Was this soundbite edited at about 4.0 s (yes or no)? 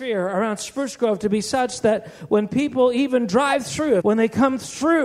yes